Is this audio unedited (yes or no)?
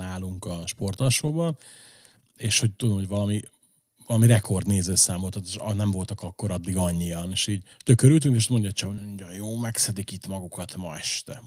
no